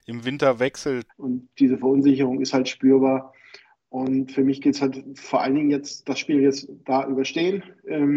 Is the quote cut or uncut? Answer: cut